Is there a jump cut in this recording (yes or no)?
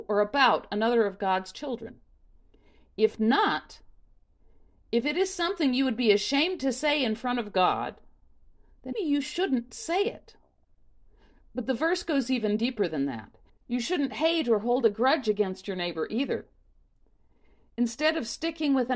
yes